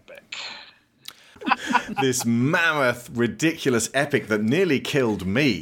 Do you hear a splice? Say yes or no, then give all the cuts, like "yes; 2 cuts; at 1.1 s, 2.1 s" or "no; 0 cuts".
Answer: yes; 1 cut; at 1.4 s